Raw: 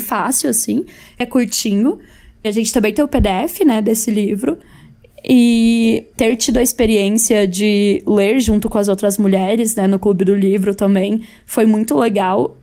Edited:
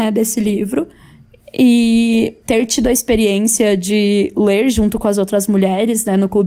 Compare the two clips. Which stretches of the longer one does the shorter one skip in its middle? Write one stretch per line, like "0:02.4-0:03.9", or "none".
none